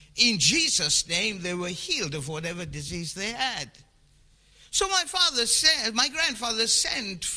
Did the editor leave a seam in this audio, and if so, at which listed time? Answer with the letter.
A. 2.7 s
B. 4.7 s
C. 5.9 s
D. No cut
D